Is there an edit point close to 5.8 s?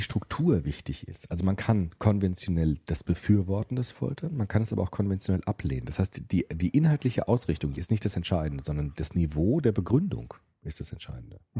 no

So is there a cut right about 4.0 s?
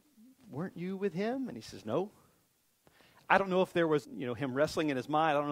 yes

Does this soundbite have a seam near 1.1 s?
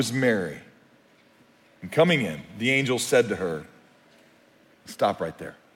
no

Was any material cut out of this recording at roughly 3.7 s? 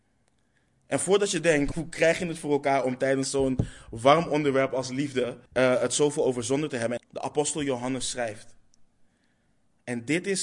no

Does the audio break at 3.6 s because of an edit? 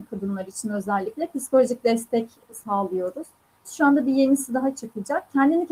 yes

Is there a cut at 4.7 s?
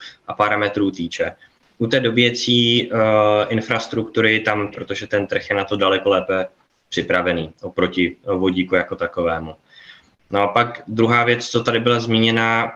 yes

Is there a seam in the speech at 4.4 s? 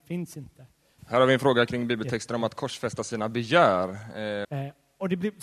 yes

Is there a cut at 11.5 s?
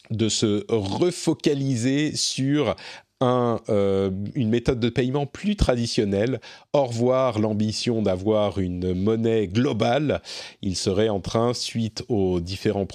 no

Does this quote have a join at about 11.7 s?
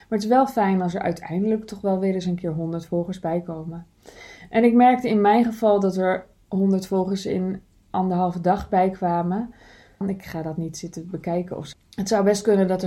yes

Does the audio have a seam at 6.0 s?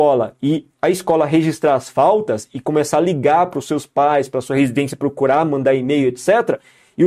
no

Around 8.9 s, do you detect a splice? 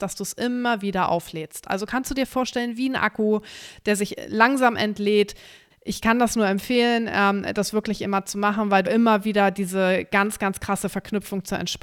yes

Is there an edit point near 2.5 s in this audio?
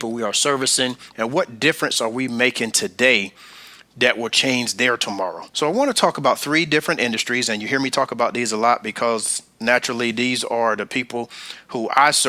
no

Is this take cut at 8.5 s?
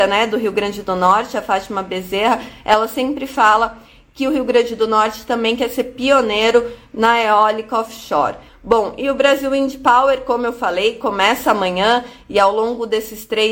yes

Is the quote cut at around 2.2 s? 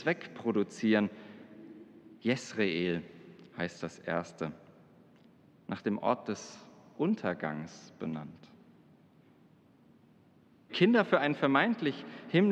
yes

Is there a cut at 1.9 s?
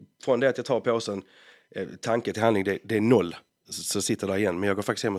no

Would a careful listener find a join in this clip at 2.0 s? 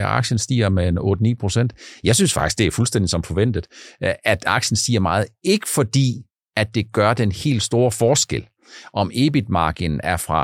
no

